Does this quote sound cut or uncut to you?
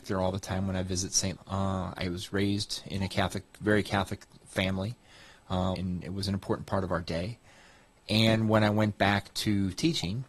cut